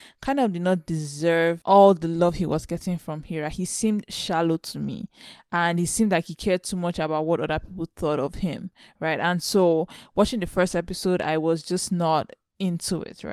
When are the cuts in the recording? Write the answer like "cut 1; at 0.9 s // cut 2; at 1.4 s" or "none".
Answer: none

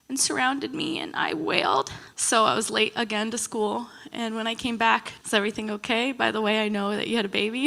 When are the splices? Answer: cut 1; at 2.1 s // cut 2; at 5.2 s

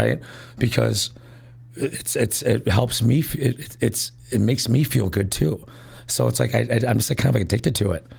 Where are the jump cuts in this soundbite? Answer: none

